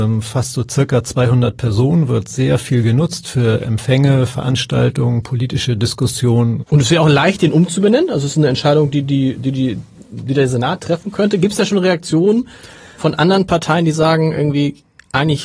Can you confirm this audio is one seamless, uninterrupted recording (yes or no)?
no